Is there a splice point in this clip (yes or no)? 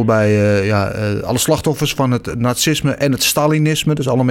no